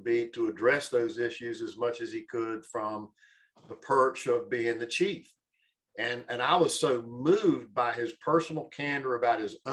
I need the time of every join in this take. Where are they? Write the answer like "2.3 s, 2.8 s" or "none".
none